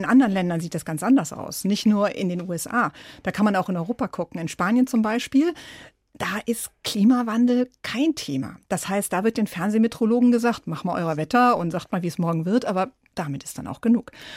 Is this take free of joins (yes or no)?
yes